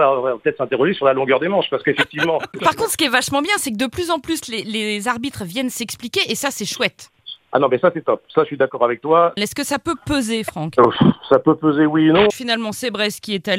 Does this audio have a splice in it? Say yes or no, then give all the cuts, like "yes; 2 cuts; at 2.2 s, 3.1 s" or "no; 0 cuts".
yes; 2 cuts; at 9.4 s, 12.3 s